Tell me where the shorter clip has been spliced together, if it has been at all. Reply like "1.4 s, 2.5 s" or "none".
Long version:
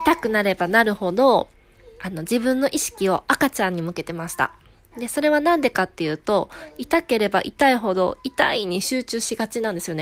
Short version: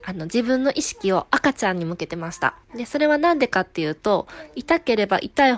2.6 s